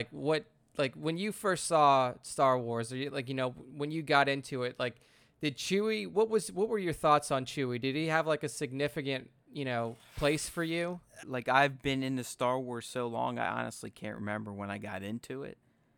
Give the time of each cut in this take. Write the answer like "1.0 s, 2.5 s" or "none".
11.2 s